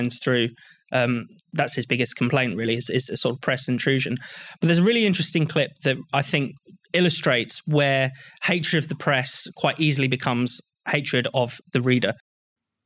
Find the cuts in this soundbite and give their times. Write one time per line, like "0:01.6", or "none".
none